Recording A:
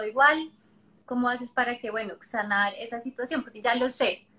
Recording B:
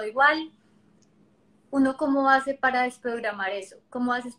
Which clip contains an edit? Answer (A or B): A